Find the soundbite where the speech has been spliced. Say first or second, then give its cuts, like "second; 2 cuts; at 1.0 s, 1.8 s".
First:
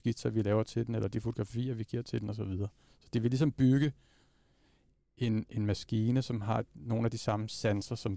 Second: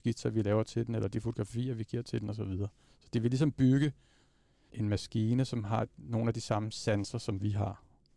second; 1 cut; at 4.7 s